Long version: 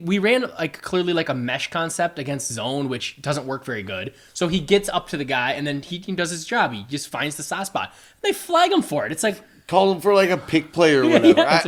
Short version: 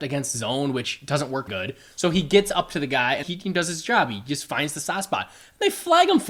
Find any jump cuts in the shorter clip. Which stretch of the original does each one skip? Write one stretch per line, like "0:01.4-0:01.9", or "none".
0:03.6-0:03.9
0:05.6-0:05.9

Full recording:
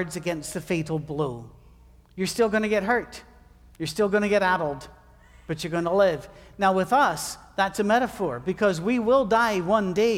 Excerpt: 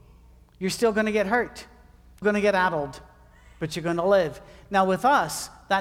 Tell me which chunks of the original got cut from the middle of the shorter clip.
0:03.8-0:04.1

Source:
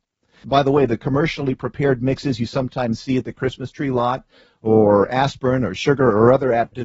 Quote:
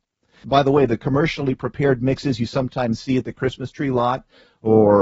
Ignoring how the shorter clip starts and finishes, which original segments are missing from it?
none

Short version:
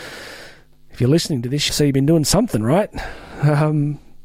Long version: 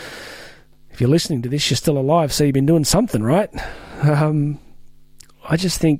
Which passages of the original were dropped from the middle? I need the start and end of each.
0:01.7-0:02.3

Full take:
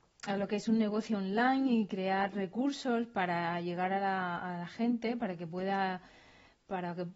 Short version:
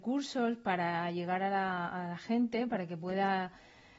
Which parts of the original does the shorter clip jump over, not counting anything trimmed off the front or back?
none

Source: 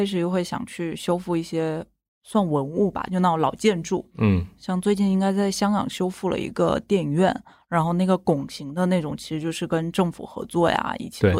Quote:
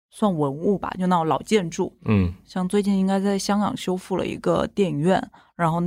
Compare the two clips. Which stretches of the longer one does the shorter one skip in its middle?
none

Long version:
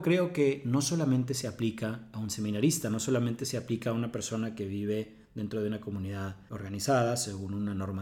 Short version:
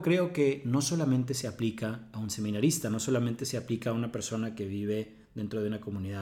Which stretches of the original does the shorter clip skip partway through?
none

